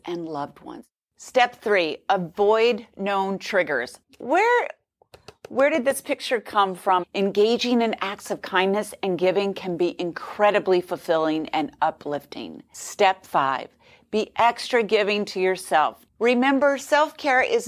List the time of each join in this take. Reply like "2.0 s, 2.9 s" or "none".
4.0 s, 7.0 s, 16.1 s